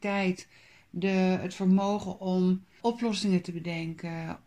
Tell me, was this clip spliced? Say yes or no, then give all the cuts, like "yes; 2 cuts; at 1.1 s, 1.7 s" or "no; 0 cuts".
yes; 1 cut; at 2.8 s